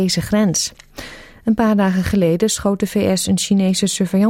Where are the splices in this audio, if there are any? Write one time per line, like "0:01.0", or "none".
none